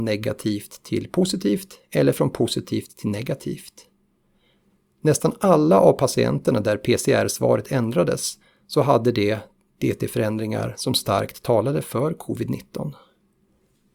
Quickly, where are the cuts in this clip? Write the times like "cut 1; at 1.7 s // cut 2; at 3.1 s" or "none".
none

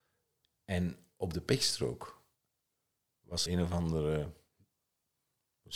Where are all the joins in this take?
cut 1; at 3.5 s

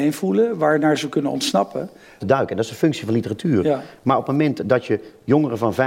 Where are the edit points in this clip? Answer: cut 1; at 2.2 s

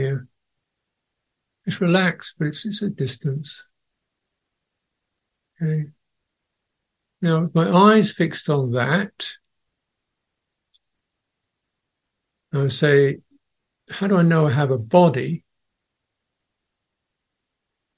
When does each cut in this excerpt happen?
none

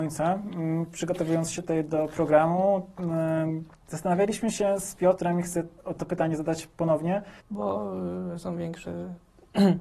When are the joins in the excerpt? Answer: cut 1; at 6.0 s // cut 2; at 7.4 s

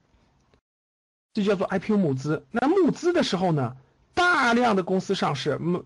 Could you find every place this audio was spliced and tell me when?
none

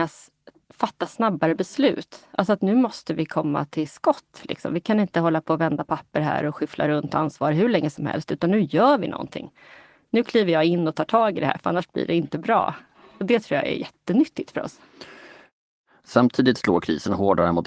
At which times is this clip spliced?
none

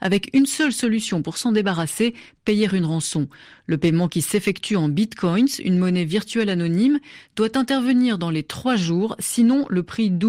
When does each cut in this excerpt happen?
none

